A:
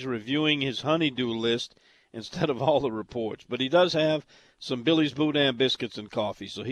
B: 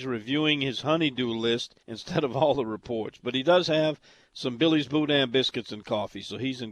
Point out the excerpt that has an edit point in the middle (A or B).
B